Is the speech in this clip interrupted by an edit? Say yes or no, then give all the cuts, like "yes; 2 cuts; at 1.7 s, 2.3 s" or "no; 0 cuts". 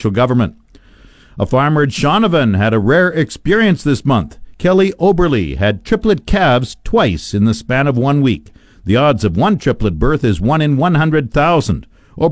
no; 0 cuts